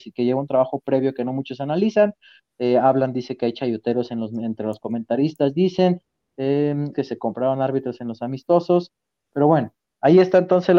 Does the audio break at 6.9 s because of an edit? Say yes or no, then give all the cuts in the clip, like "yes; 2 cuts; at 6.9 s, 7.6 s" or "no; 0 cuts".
yes; 1 cut; at 6.9 s